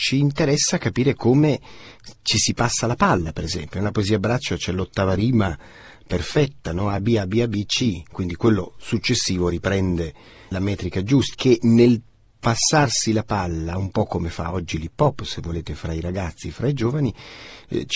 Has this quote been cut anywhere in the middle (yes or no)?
yes